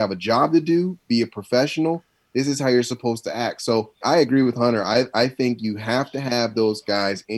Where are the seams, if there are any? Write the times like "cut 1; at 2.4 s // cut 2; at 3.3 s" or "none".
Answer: cut 1; at 4.0 s